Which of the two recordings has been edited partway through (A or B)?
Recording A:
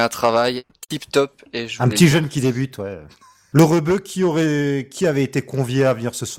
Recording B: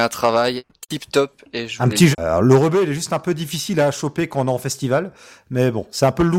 B